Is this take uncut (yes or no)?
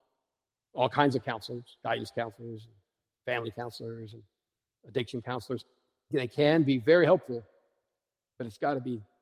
yes